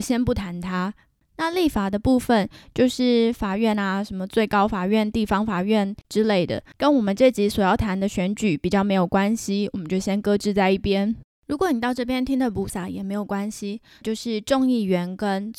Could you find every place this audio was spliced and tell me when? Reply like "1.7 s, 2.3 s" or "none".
12.7 s, 14.0 s